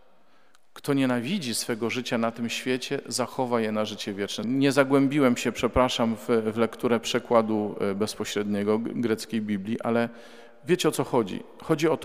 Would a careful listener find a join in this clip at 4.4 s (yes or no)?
yes